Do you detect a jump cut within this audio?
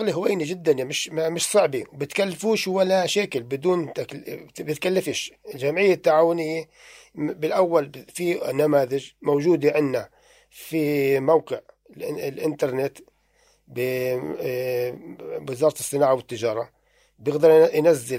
no; 0 cuts

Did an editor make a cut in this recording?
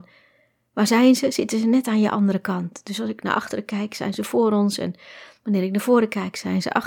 no; 0 cuts

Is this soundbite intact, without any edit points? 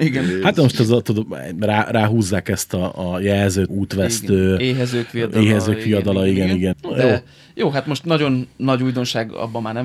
no; 2 cuts; at 3.7 s, 6.7 s

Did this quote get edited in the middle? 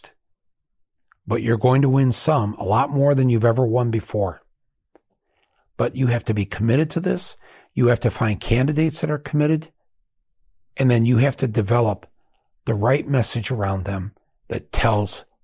no; 0 cuts

